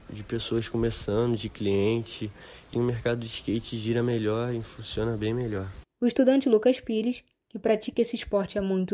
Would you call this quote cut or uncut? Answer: cut